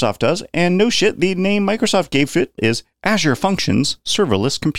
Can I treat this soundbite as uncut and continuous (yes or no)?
no